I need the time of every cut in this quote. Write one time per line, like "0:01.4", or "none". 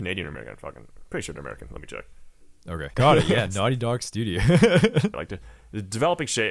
0:02.9
0:05.1